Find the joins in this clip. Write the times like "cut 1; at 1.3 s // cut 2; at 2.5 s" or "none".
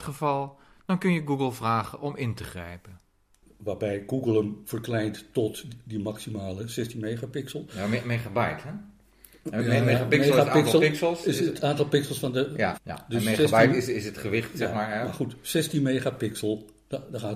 cut 1; at 12.8 s